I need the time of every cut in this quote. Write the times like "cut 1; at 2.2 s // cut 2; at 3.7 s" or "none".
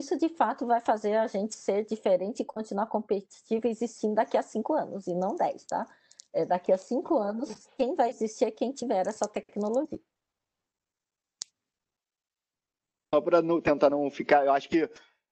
none